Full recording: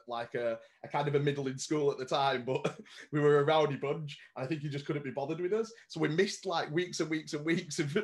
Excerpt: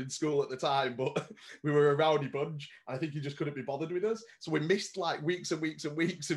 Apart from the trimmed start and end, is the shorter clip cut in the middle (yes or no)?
no